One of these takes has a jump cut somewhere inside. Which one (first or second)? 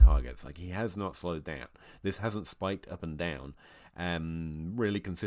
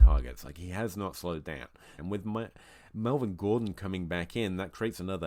second